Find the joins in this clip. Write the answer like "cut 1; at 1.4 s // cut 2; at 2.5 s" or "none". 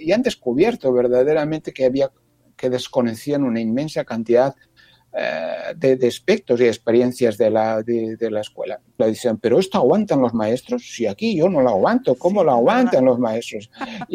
cut 1; at 9.0 s